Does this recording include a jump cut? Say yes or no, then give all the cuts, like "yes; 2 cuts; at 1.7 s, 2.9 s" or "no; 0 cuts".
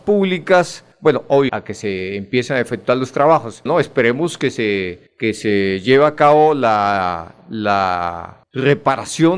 yes; 2 cuts; at 1.5 s, 3.7 s